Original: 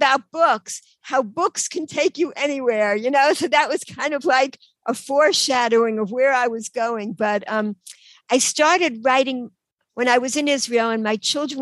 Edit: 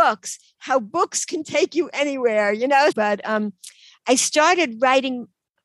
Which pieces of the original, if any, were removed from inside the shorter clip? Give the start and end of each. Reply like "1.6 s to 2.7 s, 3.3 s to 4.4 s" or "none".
3.3 s to 7.1 s